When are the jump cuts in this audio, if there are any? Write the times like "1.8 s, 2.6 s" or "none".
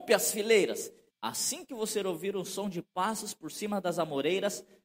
1.1 s